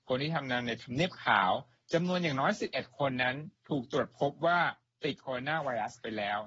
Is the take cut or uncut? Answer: uncut